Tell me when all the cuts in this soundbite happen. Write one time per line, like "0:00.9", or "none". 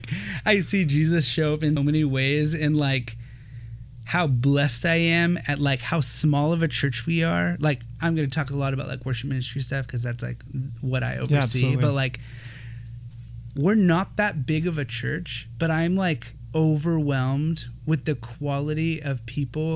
0:01.8